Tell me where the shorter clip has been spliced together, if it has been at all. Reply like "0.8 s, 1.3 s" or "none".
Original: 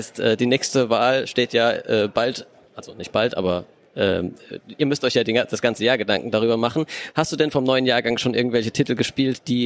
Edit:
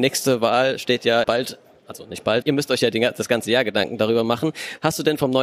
1.2 s, 2.4 s